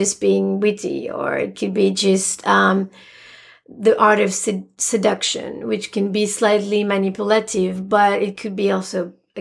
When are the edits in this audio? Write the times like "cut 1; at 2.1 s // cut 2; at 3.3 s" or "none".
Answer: none